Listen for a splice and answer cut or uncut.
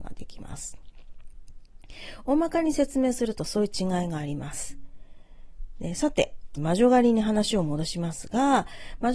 cut